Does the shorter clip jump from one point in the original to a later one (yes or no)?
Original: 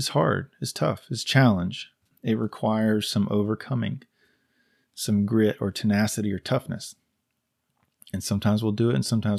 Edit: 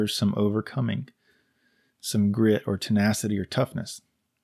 no